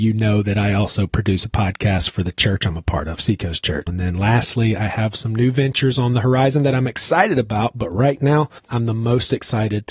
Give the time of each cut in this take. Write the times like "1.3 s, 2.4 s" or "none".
3.9 s